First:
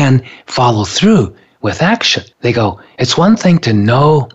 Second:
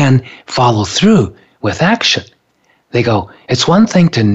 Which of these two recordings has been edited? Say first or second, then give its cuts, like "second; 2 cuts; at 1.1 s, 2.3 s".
first; 1 cut; at 2.3 s